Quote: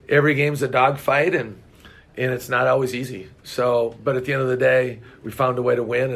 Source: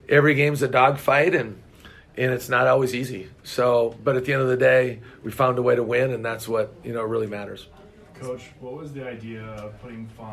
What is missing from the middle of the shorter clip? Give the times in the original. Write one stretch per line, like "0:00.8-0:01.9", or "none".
none